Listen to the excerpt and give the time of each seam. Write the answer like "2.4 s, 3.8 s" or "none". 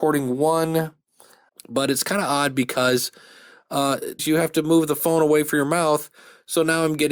1.5 s, 4.2 s